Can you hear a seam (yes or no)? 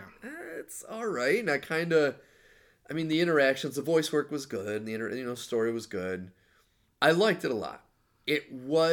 yes